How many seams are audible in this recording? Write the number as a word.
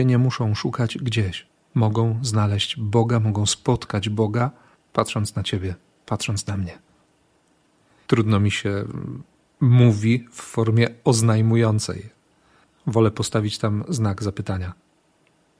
one